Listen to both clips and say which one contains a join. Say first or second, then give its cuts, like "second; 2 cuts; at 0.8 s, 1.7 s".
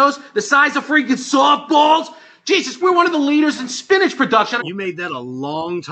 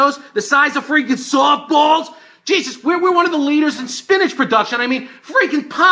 first; 2 cuts; at 2.8 s, 4.6 s